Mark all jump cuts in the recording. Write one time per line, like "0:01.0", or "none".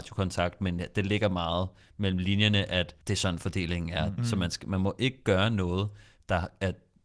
0:03.0
0:04.2